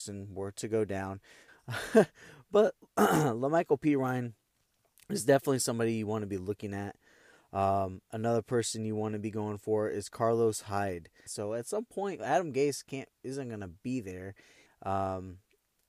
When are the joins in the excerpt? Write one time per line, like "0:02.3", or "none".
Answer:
0:01.5
0:11.3
0:14.7